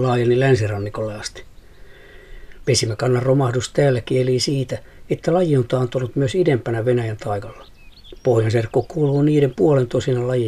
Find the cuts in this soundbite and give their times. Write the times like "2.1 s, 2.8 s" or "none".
2.6 s

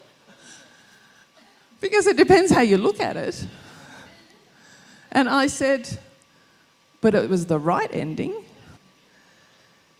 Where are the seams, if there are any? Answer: 8.8 s

